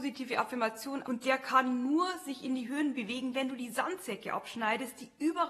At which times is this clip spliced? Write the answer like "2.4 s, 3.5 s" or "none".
1.0 s